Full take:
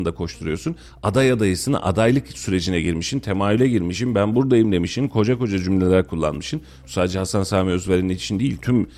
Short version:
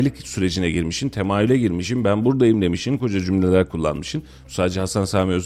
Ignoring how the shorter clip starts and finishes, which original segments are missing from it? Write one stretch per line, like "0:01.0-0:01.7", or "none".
0:05.1-0:05.4

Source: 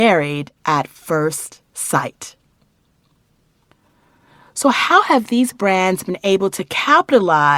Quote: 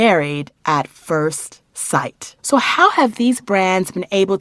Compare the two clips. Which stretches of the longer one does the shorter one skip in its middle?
0:02.4-0:04.5

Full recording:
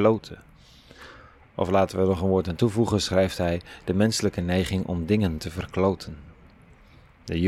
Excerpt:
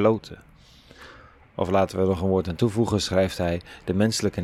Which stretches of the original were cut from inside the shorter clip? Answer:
none

